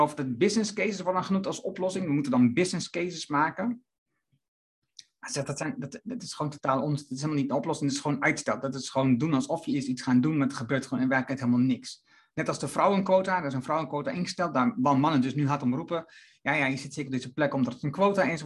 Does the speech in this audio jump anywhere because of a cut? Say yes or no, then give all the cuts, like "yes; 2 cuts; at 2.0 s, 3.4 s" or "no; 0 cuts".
no; 0 cuts